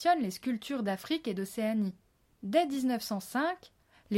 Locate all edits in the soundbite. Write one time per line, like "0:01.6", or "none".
none